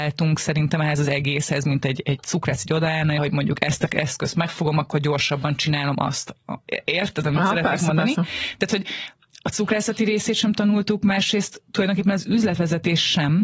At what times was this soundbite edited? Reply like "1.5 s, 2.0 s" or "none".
3.2 s